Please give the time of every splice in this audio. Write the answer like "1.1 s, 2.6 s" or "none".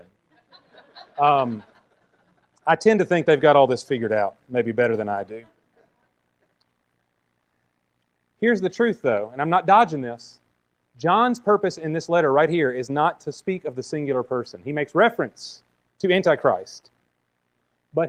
none